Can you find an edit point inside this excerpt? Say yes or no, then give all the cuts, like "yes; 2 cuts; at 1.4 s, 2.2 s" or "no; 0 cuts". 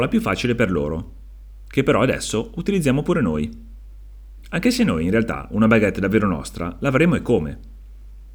no; 0 cuts